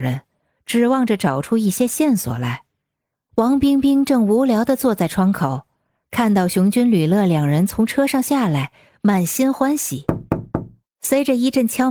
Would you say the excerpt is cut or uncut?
cut